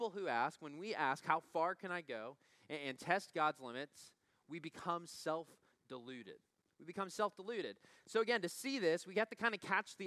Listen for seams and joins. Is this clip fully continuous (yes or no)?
yes